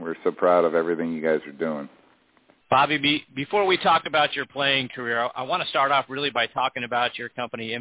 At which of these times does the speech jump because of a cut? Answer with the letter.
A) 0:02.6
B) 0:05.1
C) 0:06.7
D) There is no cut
A